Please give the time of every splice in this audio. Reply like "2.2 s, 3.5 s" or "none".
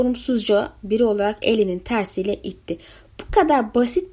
none